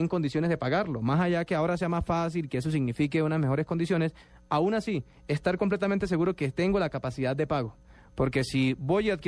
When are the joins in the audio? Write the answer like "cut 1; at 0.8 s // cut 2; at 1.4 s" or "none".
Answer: none